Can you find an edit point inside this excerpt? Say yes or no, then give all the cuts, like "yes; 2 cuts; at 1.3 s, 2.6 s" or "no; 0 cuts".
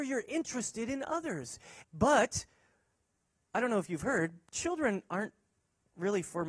yes; 1 cut; at 1.8 s